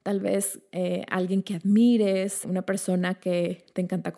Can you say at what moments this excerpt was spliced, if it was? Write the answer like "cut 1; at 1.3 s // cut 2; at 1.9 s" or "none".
cut 1; at 2.4 s